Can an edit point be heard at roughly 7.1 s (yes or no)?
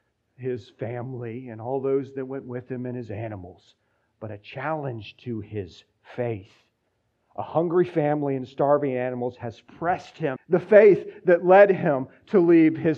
no